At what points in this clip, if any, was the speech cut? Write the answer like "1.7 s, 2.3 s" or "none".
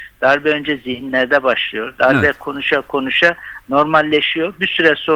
none